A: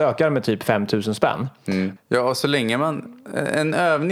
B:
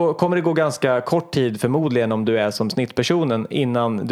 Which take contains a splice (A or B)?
A